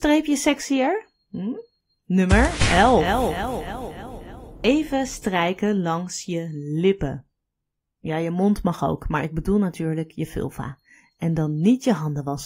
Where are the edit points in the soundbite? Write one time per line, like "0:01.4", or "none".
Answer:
none